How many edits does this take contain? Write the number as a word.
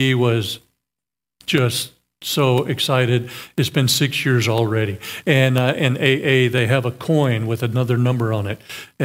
zero